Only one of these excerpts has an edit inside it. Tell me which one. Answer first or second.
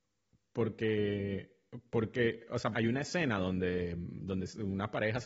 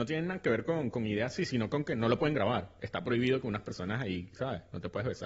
first